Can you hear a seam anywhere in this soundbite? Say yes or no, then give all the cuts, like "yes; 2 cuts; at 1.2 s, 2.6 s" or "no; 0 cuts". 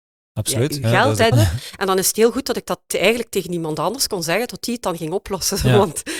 yes; 1 cut; at 1.3 s